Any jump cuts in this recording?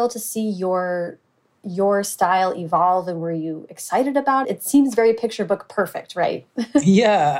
yes; 1 cut; at 4.4 s

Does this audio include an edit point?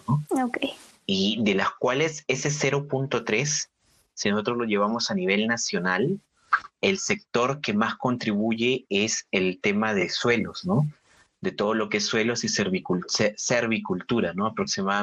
no; 0 cuts

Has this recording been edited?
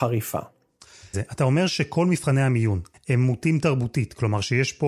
yes; 2 cuts; at 1.1 s, 2.9 s

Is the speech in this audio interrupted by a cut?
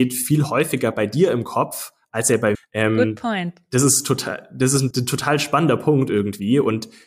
yes; 2 cuts; at 2.5 s, 4.9 s

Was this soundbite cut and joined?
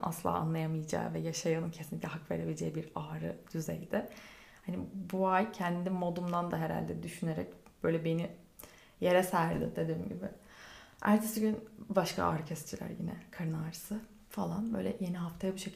no; 0 cuts

